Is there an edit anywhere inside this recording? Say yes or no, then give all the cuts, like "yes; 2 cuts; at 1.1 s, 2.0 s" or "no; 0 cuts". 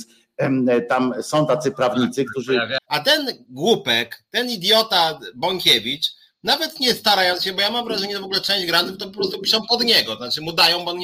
yes; 1 cut; at 2.8 s